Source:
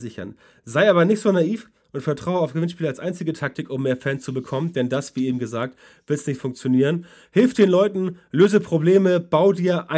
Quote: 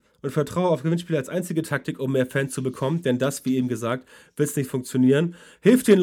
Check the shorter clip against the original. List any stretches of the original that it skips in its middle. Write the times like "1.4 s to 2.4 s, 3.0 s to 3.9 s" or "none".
none